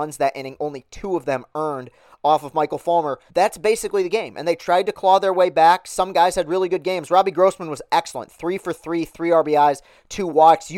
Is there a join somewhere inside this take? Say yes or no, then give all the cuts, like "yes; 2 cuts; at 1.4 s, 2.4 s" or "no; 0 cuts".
yes; 1 cut; at 3.3 s